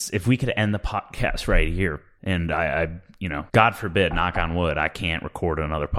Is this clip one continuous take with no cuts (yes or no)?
no